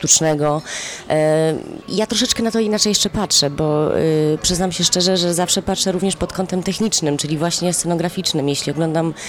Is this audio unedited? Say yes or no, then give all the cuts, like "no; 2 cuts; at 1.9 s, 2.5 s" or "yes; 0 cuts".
no; 1 cut; at 1.8 s